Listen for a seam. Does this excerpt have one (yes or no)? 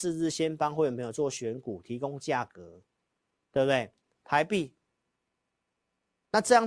yes